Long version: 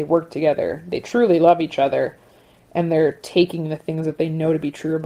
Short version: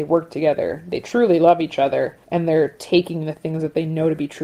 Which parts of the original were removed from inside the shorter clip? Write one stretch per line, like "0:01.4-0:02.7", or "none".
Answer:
0:02.2-0:02.7